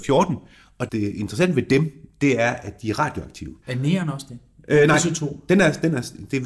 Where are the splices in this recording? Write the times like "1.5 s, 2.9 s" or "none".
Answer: 3.6 s